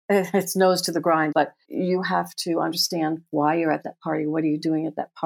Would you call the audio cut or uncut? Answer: cut